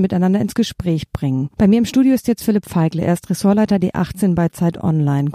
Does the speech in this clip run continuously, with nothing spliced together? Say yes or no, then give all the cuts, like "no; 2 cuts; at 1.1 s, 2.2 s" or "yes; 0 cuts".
yes; 0 cuts